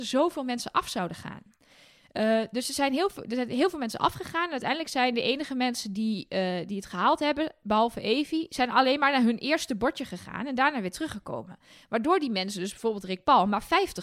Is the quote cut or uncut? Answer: uncut